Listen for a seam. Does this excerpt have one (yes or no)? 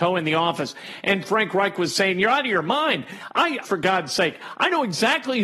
yes